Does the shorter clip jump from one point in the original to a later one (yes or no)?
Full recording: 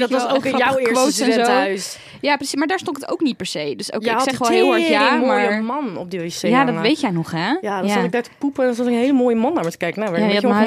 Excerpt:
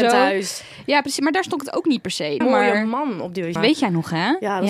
yes